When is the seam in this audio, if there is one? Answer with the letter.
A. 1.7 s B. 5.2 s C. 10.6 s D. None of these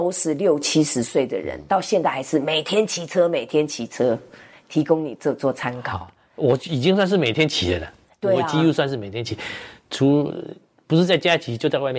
B